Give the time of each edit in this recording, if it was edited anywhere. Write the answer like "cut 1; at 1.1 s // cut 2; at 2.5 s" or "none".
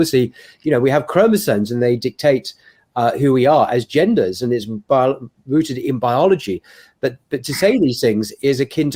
none